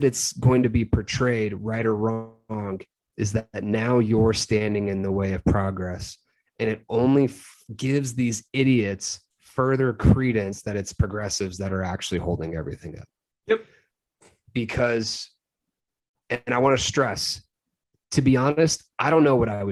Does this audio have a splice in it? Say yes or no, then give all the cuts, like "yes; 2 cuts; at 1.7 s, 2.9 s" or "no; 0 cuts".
no; 0 cuts